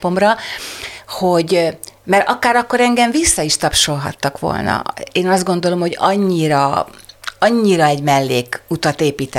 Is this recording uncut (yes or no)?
yes